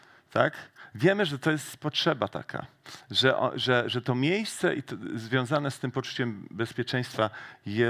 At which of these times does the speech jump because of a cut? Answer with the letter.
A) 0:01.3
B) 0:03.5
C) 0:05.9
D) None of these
D